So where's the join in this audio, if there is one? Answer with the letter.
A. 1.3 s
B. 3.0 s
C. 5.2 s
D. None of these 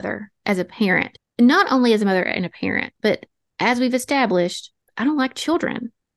B